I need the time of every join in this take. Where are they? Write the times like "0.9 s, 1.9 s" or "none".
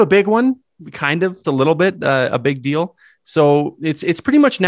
1.4 s